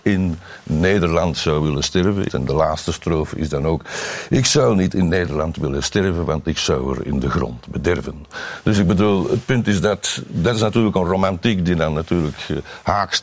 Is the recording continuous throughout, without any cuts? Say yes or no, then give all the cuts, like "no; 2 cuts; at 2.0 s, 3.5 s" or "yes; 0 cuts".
no; 1 cut; at 2.3 s